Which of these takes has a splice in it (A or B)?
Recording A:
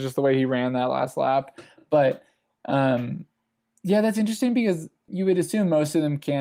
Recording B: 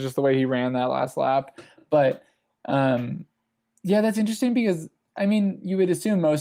A